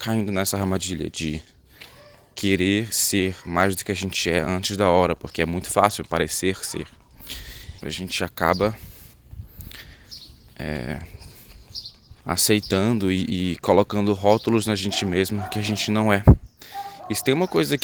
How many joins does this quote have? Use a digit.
2